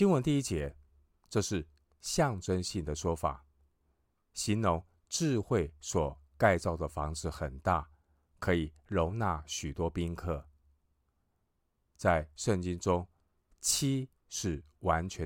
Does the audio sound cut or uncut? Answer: cut